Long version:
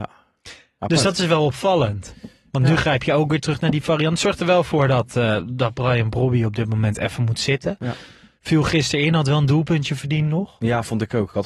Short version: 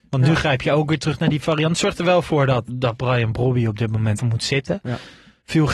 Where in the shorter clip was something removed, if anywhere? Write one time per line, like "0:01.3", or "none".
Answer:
0:02.7
0:04.2